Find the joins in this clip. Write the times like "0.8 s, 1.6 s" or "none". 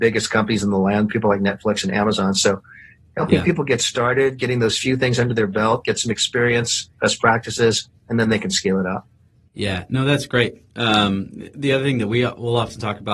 none